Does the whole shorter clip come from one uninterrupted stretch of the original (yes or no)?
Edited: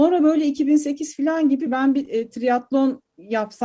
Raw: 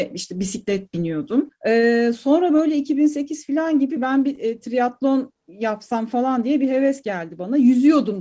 yes